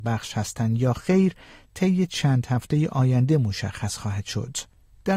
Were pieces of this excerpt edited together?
no; 0 cuts

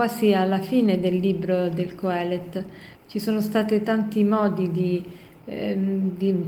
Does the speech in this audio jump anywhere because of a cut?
yes; 1 cut; at 2.9 s

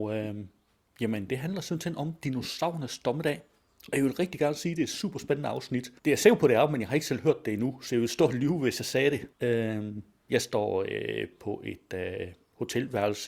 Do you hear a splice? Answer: yes; 2 cuts; at 6.0 s, 9.3 s

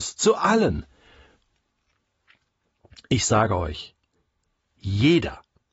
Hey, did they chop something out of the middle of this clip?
no; 0 cuts

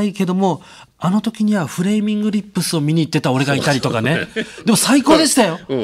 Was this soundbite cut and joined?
no; 0 cuts

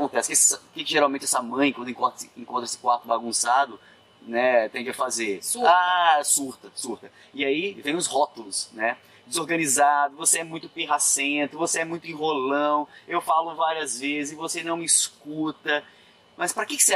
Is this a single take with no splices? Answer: yes; 0 cuts

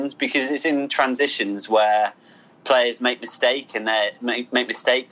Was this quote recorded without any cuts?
yes; 0 cuts

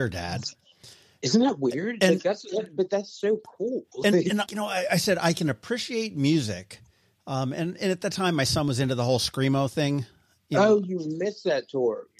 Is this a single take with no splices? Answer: no; 1 cut; at 4.5 s

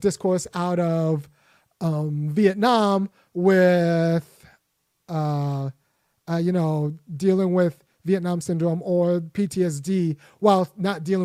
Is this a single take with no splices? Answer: yes; 0 cuts

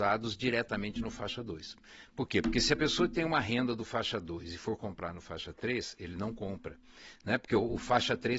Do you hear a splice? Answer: no; 0 cuts

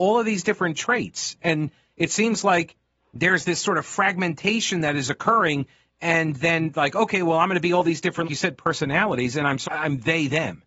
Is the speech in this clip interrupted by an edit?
yes; 2 cuts; at 8.2 s, 9.6 s

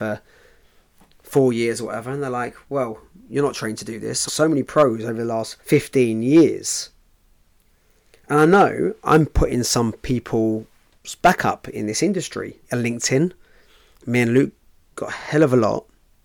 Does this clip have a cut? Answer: yes; 3 cuts; at 4.3 s, 5.6 s, 12.6 s

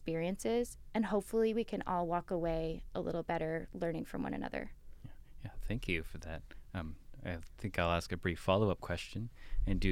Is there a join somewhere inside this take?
no; 0 cuts

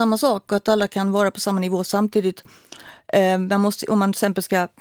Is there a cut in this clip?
no; 0 cuts

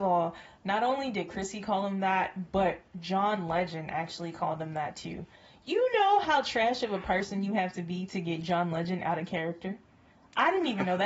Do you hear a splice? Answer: no; 0 cuts

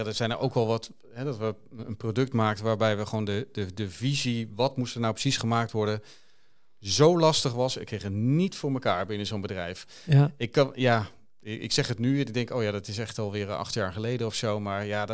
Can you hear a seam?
no; 0 cuts

